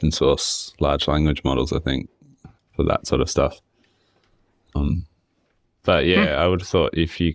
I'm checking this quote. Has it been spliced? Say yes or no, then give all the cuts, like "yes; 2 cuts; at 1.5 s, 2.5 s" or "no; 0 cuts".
no; 0 cuts